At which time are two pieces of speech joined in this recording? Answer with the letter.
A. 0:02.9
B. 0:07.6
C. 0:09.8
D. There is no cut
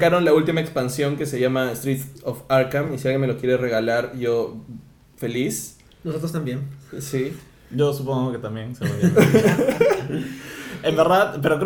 D